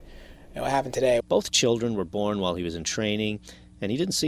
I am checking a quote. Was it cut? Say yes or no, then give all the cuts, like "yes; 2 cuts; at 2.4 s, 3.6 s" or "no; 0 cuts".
yes; 1 cut; at 1.2 s